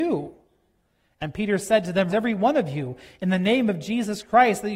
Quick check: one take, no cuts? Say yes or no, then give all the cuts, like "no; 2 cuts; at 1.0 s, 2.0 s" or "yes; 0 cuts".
no; 1 cut; at 2.1 s